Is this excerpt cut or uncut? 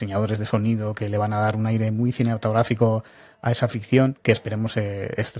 uncut